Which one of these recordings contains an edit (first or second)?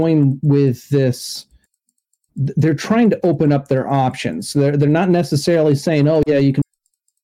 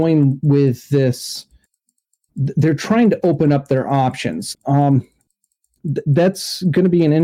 second